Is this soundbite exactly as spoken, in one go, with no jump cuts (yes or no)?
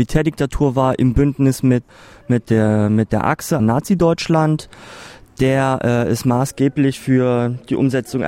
no